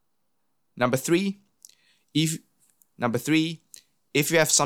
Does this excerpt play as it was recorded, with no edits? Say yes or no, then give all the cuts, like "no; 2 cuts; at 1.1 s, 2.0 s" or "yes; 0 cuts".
yes; 0 cuts